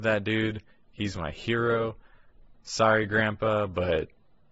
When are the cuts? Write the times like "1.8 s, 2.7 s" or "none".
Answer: none